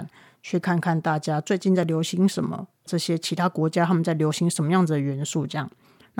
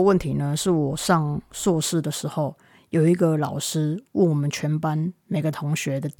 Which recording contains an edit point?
first; 1 cut; at 2.9 s

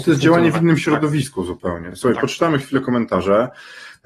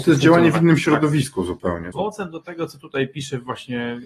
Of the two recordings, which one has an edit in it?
second; 1 cut; at 1.9 s

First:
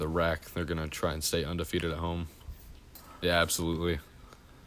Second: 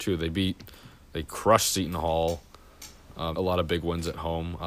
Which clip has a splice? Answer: second; 1 cut; at 3.3 s

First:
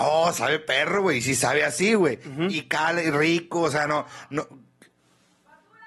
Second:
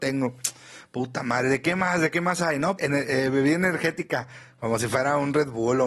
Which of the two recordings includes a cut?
second; 1 cut; at 2.8 s

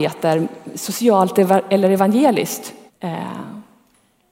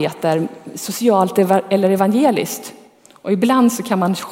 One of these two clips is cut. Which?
first; 1 cut; at 2.9 s

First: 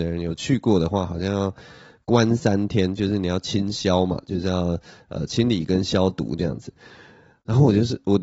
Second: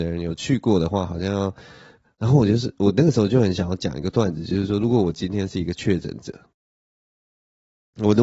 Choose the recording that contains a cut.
second; 1 cut; at 2.0 s

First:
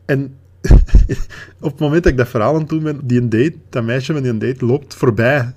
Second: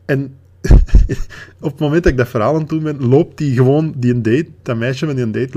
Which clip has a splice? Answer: first; 1 cut; at 3.0 s

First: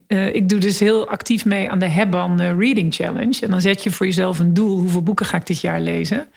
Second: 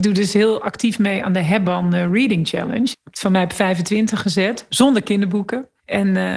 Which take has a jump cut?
second; 1 cut; at 2.9 s

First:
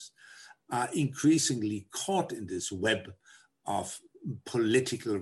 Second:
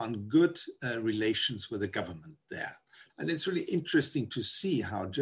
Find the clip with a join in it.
second; 1 cut; at 3.1 s

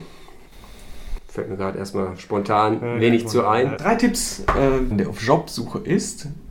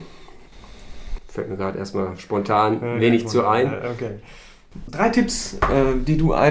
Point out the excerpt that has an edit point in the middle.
first; 2 cuts; at 3.8 s, 4.9 s

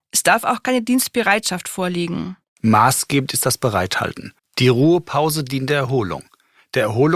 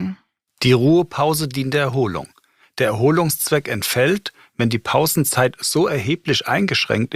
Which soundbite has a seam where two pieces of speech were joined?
first; 2 cuts; at 2.4 s, 4.4 s

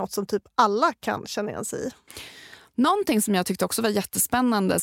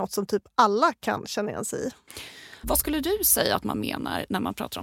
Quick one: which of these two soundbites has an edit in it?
second; 1 cut; at 2.6 s

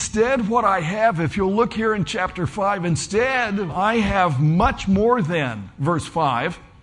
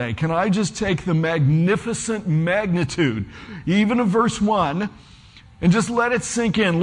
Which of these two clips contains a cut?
first; 1 cut; at 3.7 s

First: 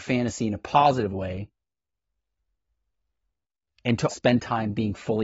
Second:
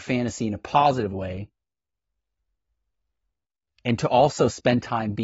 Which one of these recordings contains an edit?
first; 1 cut; at 4.1 s

